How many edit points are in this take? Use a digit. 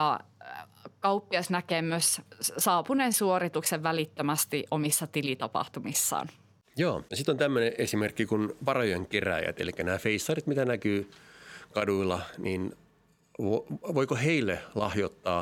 1